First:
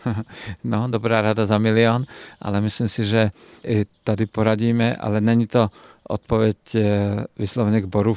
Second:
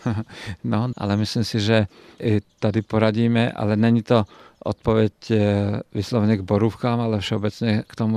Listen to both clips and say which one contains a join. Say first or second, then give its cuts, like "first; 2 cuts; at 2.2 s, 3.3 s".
second; 1 cut; at 0.9 s